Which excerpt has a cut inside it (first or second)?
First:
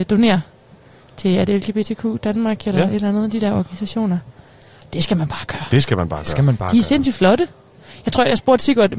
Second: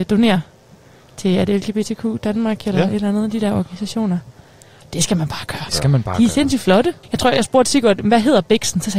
second